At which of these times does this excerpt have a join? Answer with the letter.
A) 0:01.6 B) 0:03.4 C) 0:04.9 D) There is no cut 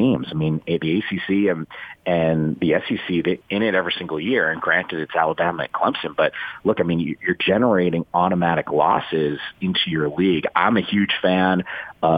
B